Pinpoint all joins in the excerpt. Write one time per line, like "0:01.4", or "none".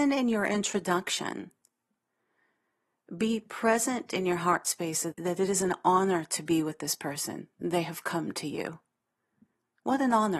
0:05.1